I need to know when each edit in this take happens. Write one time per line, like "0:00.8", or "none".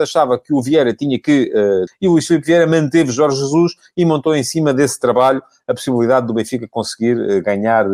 0:01.9